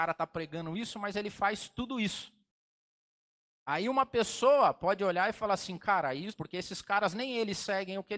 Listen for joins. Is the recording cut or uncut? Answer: cut